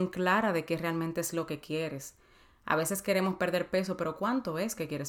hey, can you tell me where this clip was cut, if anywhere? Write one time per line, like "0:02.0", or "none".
none